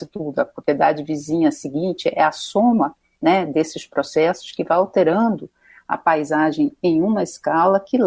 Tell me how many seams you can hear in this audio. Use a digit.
0